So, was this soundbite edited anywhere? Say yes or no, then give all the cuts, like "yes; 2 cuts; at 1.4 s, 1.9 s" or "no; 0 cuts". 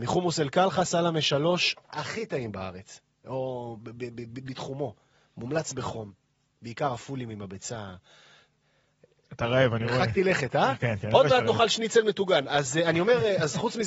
no; 0 cuts